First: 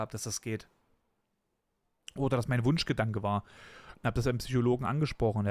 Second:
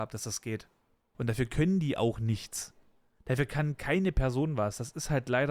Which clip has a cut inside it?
second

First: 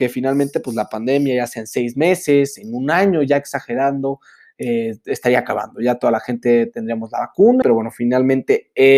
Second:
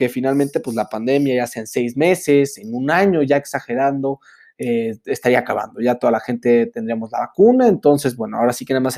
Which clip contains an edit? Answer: first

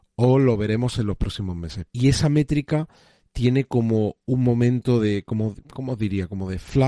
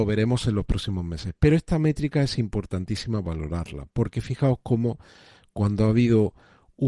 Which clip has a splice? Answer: first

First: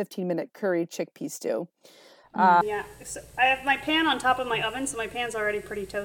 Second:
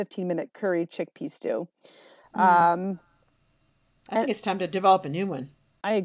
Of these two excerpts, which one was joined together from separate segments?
first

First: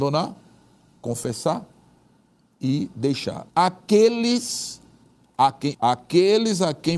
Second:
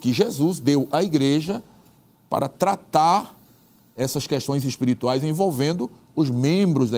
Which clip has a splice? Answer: first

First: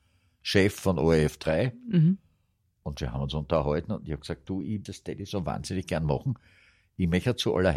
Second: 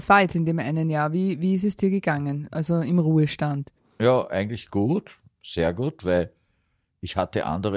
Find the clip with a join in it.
first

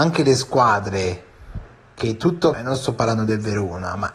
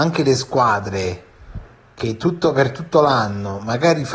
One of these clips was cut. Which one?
first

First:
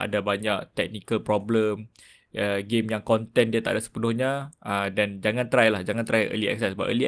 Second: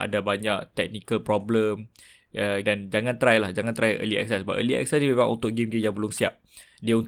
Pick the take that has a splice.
second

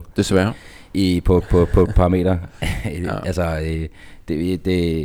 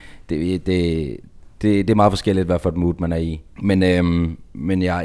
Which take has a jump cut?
second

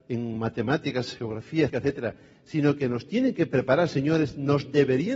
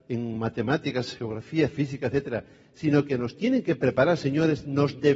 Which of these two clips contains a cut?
first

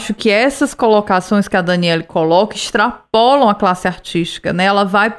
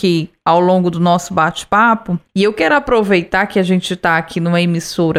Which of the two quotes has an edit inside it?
second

